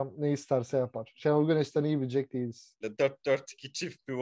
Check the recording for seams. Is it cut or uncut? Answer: cut